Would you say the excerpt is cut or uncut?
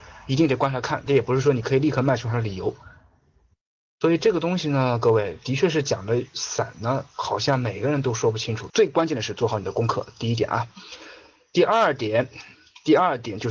cut